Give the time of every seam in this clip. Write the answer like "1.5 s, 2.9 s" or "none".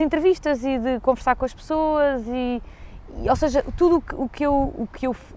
none